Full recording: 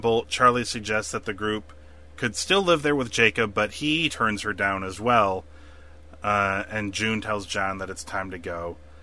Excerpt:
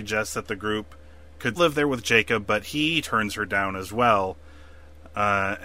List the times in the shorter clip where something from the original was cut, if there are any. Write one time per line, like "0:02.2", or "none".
0:01.6